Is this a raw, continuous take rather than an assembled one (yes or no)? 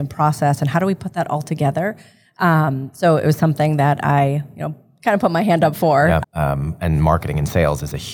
no